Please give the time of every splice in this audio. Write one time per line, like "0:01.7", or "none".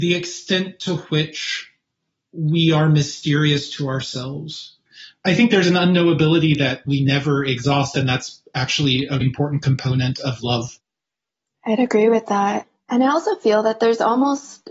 0:09.2